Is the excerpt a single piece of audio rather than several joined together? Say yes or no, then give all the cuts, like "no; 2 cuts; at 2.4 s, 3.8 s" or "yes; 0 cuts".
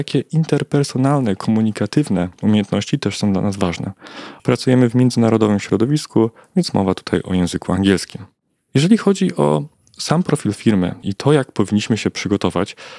no; 2 cuts; at 4.4 s, 11.0 s